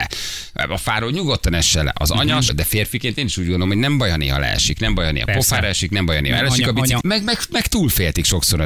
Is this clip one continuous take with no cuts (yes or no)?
no